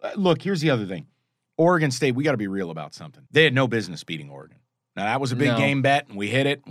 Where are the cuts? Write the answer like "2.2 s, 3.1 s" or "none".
3.3 s